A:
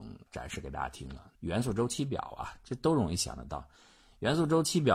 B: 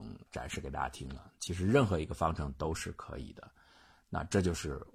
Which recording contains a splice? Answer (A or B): A